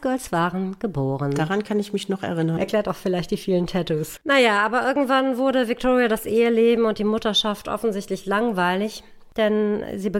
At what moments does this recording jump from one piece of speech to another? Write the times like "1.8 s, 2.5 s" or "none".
2.6 s, 4.2 s